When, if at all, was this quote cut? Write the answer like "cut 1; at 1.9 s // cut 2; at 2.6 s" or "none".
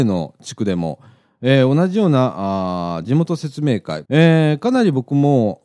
cut 1; at 4.0 s